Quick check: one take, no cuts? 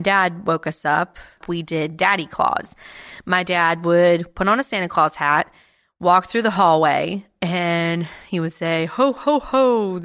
no; 1 cut; at 1.4 s

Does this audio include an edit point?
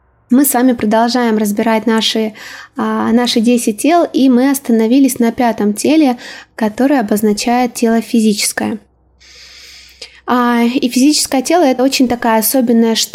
no; 0 cuts

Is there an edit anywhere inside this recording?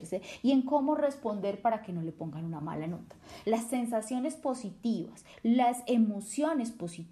yes; 1 cut; at 3.4 s

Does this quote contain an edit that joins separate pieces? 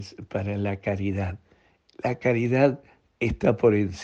no; 0 cuts

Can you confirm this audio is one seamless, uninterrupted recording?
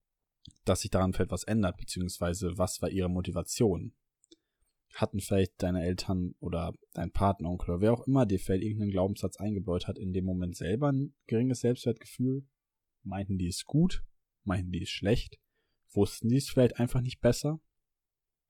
yes; 0 cuts

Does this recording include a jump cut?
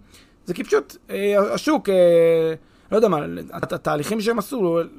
yes; 1 cut; at 3.6 s

